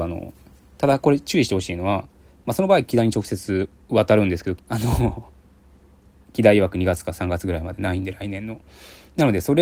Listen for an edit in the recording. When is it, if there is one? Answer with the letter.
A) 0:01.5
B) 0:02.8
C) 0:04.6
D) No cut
C